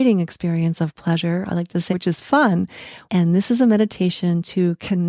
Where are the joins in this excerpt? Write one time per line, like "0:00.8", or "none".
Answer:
0:01.9
0:03.1